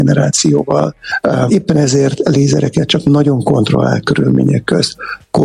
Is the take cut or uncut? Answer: cut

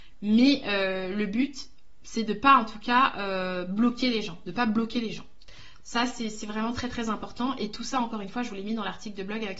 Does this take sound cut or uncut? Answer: uncut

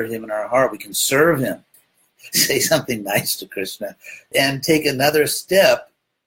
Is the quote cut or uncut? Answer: cut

